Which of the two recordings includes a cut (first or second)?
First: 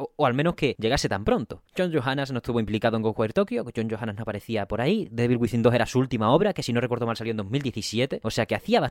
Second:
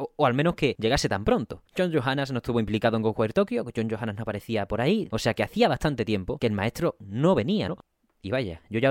second